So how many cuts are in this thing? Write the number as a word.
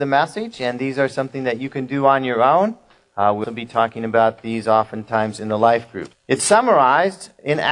two